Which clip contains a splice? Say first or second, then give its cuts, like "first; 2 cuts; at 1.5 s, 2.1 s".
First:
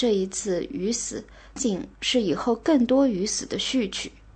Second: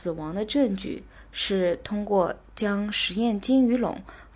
first; 1 cut; at 1.6 s